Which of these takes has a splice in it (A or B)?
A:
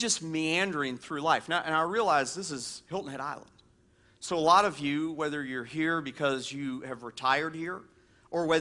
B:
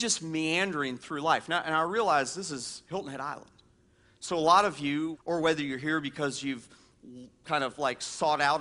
B